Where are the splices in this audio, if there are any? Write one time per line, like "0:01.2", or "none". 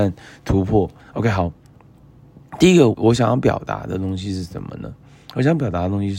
0:01.0
0:02.9